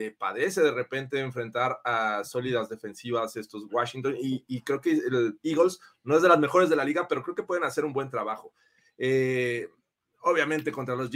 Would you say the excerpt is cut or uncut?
uncut